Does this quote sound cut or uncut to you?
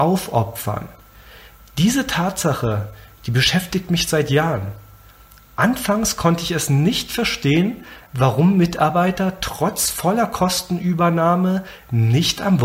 uncut